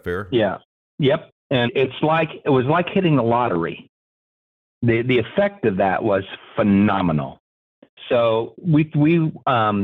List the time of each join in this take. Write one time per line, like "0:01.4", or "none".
0:01.7